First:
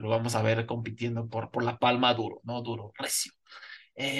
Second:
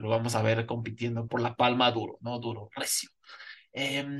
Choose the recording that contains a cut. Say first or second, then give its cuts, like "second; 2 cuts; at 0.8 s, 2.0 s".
second; 1 cut; at 1.3 s